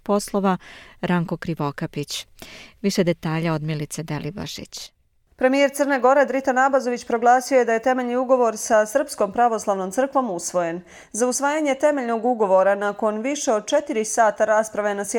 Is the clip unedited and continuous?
yes; 0 cuts

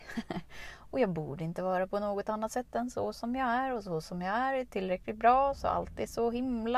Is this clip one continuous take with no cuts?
yes; 0 cuts

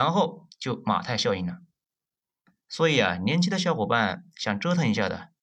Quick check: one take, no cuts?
yes; 0 cuts

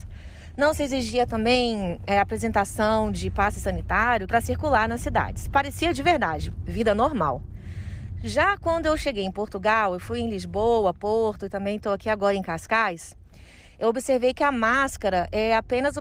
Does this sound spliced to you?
yes; 1 cut; at 4.3 s

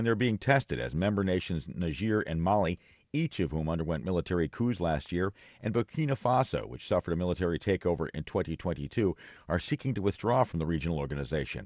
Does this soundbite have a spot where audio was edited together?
no; 0 cuts

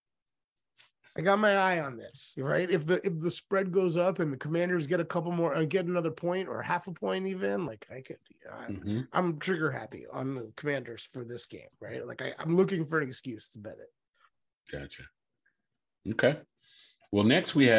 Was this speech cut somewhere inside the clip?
no; 0 cuts

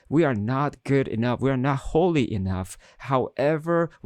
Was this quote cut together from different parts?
no; 0 cuts

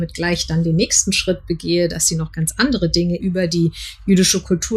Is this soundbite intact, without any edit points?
no; 1 cut; at 3.2 s

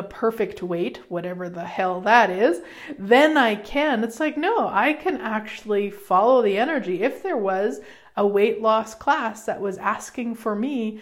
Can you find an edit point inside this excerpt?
no; 0 cuts

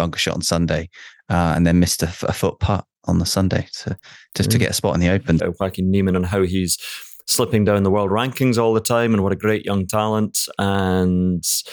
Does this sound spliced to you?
yes; 1 cut; at 5.4 s

